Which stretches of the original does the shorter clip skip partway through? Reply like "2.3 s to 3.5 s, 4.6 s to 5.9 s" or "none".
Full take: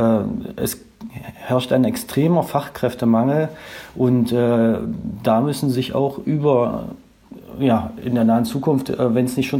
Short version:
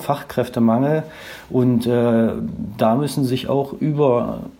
none